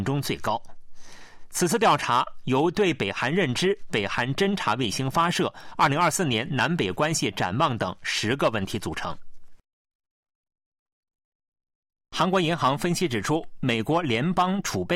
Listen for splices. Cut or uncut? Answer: uncut